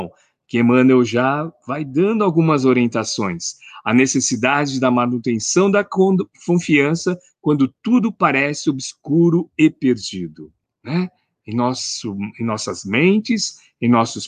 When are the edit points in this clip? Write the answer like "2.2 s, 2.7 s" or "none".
10.7 s